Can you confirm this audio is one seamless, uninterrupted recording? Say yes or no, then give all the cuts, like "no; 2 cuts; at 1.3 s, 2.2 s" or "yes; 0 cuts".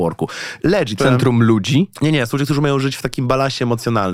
no; 1 cut; at 1.0 s